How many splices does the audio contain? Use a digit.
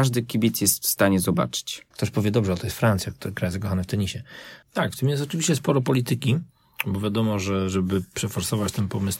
2